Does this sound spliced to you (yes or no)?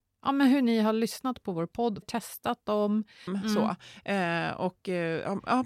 yes